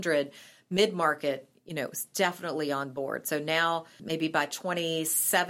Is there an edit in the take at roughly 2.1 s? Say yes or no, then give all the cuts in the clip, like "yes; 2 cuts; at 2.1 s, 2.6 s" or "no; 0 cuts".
no; 1 cut; at 4.0 s